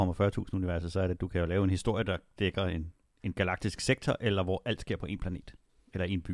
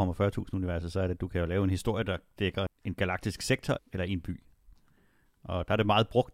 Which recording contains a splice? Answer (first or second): second